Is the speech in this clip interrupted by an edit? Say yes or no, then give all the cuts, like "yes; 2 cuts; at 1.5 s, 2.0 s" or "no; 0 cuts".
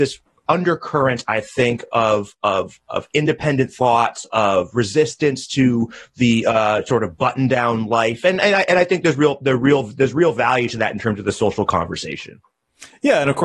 no; 0 cuts